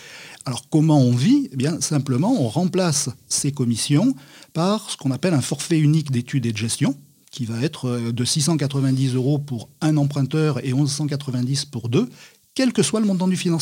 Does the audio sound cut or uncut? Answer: uncut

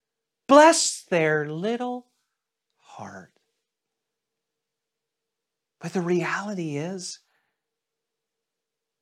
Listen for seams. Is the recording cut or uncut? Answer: uncut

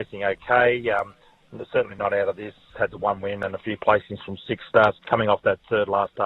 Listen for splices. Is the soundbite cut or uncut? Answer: cut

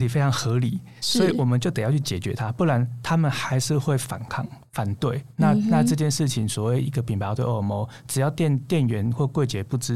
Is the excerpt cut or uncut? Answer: uncut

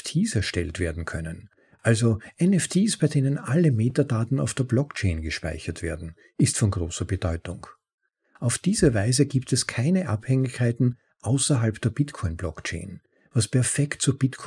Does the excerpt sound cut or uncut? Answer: uncut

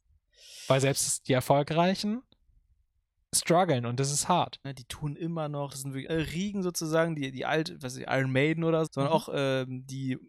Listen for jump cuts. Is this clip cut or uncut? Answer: cut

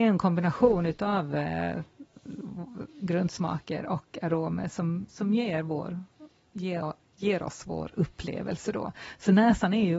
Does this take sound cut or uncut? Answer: uncut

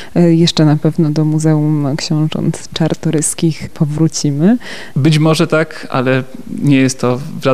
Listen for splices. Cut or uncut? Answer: cut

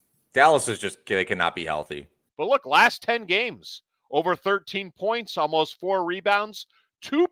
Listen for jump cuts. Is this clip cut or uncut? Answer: cut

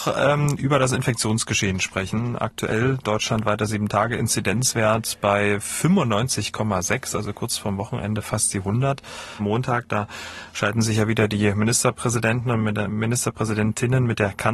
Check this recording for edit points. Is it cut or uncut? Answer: cut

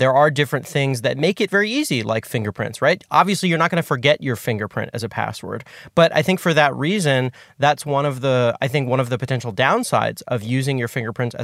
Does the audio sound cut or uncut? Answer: uncut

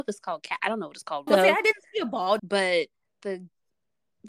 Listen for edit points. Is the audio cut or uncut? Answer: cut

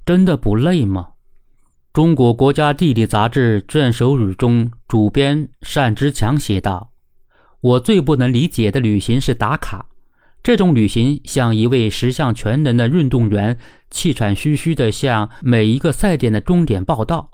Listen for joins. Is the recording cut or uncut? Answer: uncut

